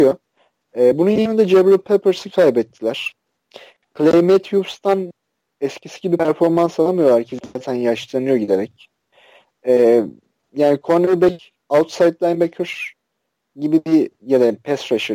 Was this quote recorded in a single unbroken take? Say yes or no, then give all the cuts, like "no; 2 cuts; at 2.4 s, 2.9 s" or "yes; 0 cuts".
yes; 0 cuts